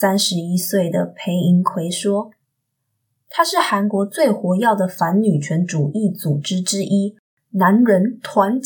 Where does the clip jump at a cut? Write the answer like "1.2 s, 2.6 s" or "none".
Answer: none